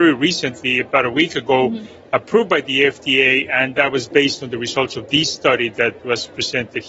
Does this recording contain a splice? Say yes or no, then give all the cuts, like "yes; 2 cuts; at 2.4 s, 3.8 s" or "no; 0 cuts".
no; 0 cuts